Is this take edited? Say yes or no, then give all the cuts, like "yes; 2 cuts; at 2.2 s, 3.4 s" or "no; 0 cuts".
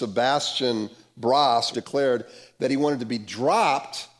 yes; 1 cut; at 1.7 s